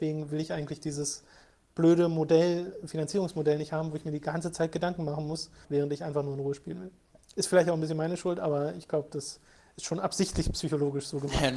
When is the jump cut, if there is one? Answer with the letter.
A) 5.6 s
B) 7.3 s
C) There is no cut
A